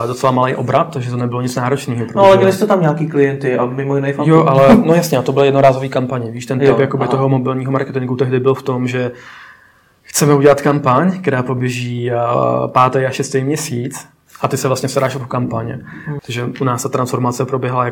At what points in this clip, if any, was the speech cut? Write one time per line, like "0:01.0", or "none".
0:16.2